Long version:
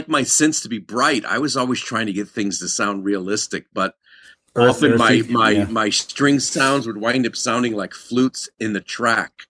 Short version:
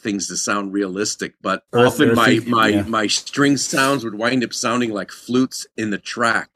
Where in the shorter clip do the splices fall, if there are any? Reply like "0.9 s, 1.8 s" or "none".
1.7 s